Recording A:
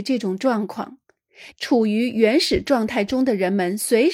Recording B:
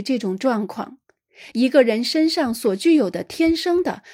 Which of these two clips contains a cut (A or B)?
A